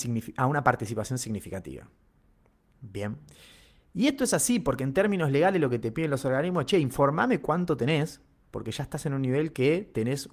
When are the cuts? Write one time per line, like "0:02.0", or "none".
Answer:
none